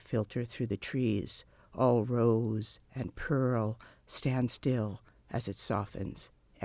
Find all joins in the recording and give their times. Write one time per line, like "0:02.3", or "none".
none